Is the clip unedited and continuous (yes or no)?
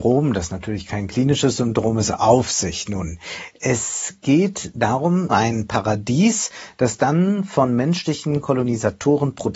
no